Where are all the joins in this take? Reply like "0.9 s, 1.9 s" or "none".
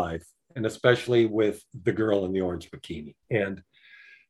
3.2 s